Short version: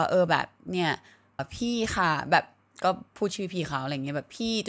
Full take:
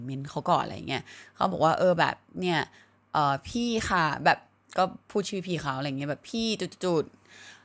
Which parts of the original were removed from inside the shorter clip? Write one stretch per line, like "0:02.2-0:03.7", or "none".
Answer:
0:03.1-0:03.3